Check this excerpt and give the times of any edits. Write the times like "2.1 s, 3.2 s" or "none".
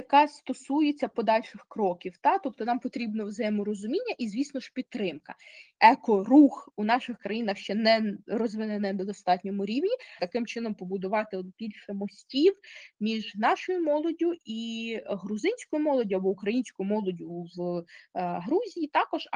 5.7 s, 10.2 s